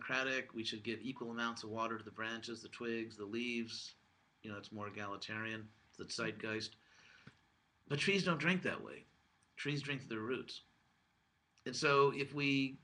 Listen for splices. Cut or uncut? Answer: uncut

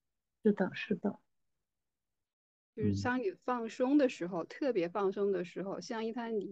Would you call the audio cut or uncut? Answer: uncut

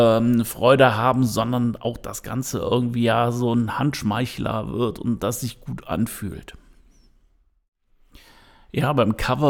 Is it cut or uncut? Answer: uncut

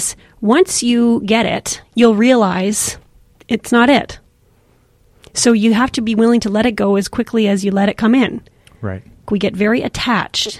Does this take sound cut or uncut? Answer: cut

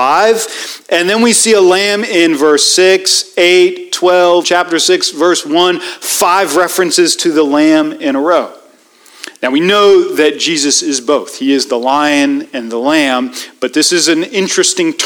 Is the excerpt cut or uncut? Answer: cut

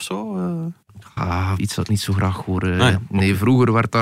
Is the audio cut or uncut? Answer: cut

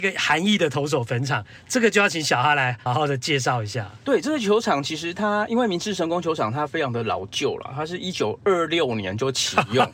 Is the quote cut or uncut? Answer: cut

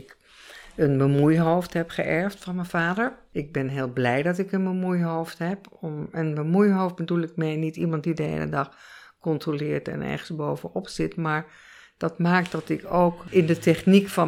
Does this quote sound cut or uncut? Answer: uncut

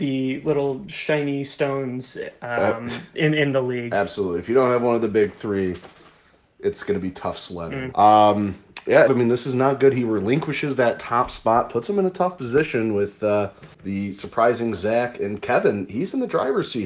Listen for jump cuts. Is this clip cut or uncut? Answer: cut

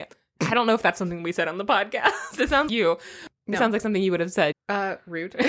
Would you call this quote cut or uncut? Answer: cut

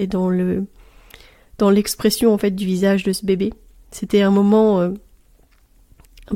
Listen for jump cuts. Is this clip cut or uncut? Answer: uncut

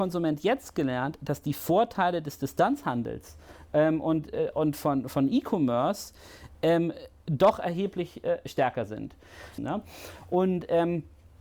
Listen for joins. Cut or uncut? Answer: cut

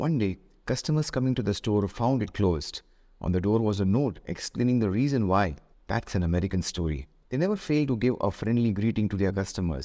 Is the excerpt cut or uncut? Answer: cut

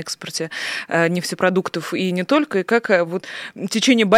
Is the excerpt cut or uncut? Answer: uncut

